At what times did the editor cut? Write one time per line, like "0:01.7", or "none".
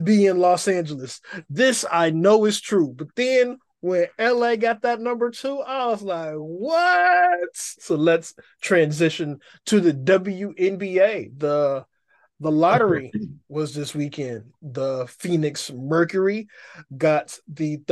0:07.8
0:14.6